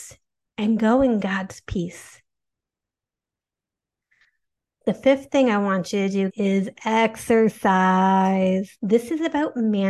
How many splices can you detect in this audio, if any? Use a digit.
2